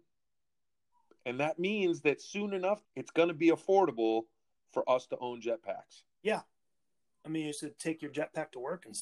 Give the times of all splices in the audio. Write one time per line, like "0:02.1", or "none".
0:02.8